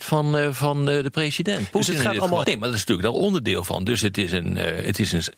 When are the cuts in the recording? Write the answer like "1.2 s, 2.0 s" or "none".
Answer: 2.4 s